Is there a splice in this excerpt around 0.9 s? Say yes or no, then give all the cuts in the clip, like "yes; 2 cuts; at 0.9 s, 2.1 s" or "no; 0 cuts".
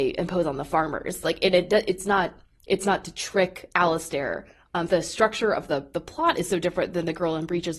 no; 1 cut; at 4.9 s